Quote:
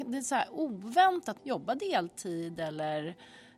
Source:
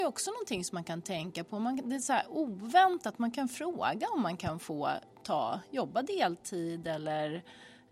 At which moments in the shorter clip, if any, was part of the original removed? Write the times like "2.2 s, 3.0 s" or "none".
1.4 s